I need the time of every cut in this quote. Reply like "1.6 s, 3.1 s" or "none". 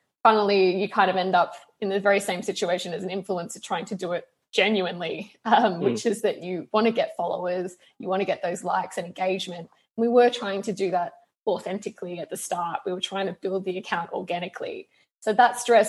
none